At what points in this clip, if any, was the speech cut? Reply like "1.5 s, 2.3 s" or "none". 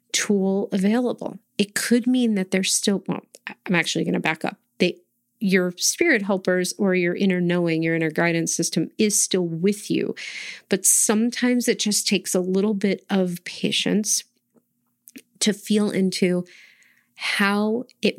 none